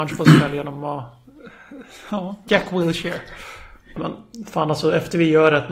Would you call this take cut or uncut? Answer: cut